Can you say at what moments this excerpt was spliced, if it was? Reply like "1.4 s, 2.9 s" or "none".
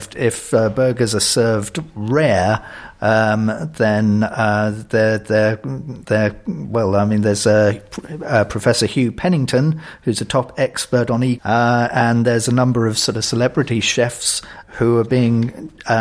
11.4 s, 14.6 s